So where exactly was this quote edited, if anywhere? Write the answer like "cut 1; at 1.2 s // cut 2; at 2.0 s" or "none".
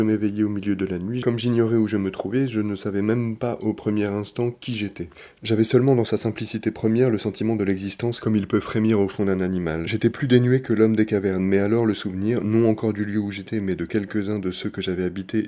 none